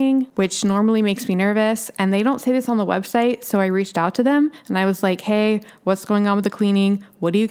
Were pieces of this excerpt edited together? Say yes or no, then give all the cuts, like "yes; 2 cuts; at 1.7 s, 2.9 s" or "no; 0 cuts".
no; 0 cuts